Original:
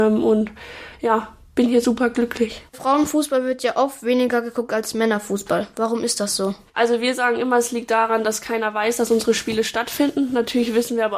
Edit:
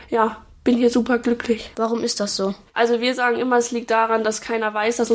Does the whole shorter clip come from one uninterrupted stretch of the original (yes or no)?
no